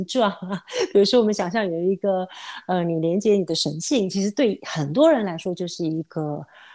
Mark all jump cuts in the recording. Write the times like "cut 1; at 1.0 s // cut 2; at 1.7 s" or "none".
none